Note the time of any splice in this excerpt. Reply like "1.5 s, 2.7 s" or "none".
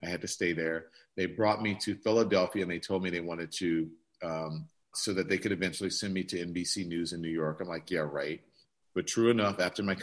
4.9 s